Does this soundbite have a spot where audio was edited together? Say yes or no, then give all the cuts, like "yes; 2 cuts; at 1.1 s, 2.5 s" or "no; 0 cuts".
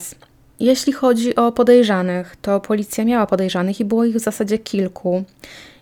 no; 0 cuts